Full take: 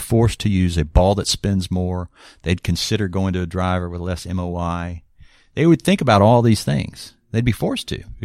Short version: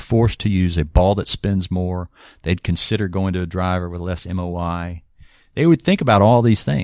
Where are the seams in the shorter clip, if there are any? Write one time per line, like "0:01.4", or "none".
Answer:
none